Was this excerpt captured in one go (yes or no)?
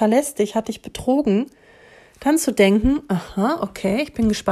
yes